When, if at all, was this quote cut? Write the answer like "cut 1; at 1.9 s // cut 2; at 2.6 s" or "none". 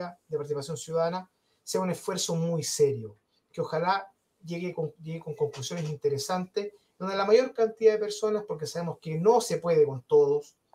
none